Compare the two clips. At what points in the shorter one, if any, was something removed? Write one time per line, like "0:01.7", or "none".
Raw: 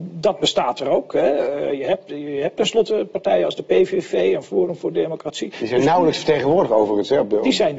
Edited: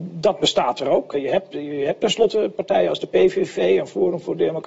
0:01.1